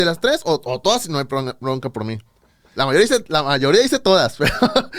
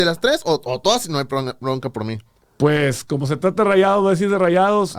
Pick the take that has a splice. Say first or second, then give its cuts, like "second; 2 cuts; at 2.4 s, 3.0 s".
second; 1 cut; at 2.4 s